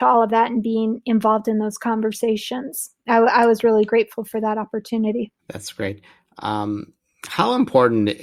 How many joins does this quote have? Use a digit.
1